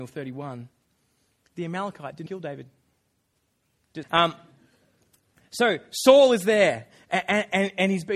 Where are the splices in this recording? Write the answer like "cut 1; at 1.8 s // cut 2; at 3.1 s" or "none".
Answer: cut 1; at 2.3 s // cut 2; at 4.0 s

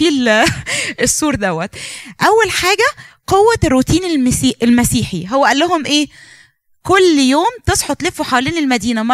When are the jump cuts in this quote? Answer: none

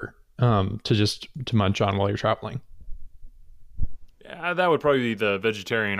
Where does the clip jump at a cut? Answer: none

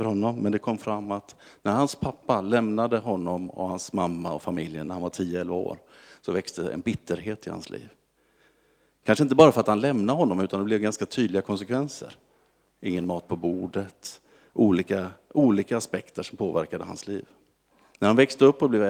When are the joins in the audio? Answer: none

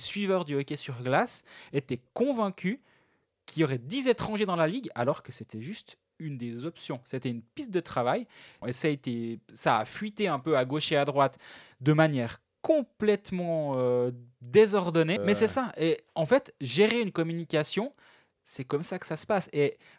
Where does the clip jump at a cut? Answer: cut 1; at 8.6 s // cut 2; at 15.2 s

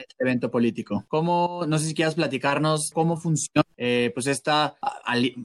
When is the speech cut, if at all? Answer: cut 1; at 2.9 s

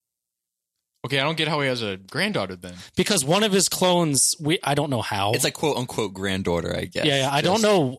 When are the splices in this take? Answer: none

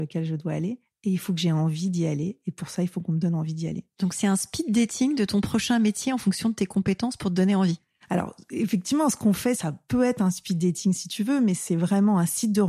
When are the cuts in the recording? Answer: none

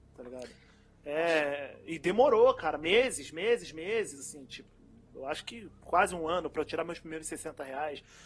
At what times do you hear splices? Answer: none

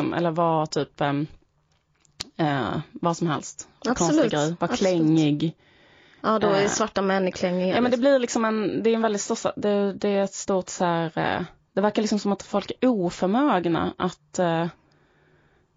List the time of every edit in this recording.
none

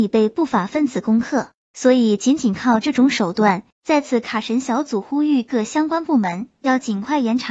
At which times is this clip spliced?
cut 1; at 3.7 s

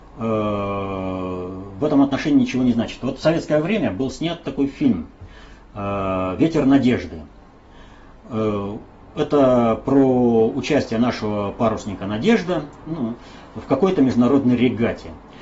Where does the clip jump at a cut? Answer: none

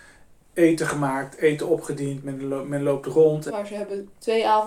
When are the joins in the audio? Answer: cut 1; at 3.5 s

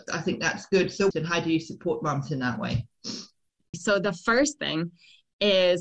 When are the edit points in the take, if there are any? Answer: cut 1; at 1.1 s // cut 2; at 3.7 s

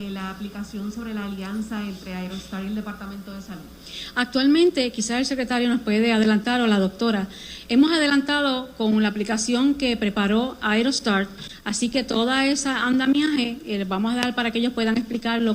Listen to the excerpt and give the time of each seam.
cut 1; at 7.7 s

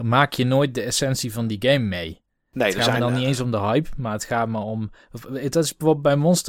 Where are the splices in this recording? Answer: none

